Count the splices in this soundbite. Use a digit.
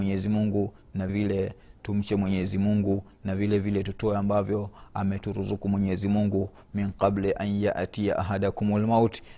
1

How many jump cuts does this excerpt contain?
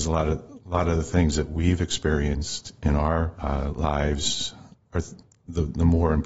0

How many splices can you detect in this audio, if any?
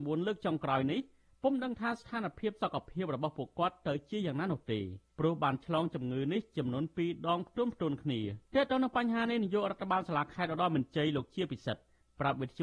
1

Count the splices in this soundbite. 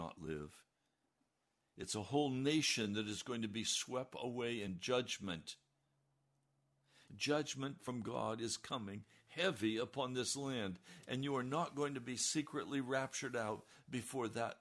1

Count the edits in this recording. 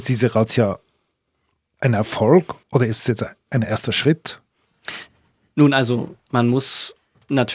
1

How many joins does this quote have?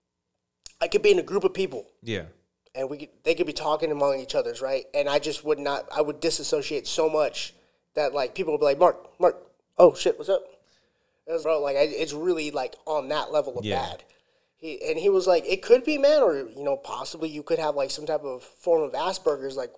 1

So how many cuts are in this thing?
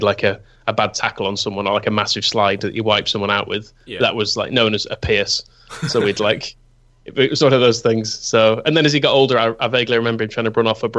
0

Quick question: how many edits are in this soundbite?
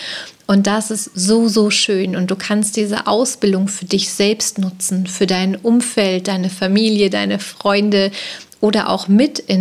0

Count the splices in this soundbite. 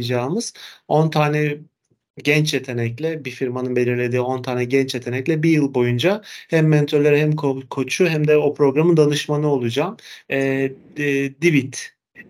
1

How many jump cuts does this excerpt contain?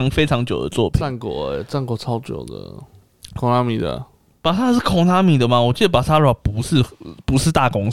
1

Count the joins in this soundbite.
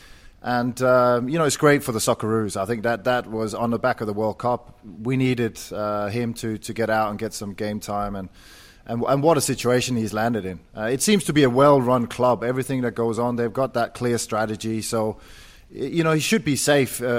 0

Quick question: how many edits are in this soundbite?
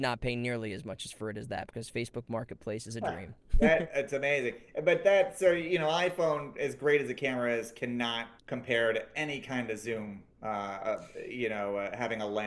2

